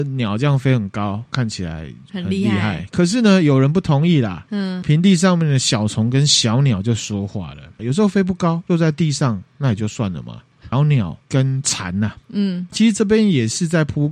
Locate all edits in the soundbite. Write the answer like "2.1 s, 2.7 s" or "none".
7.8 s, 10.7 s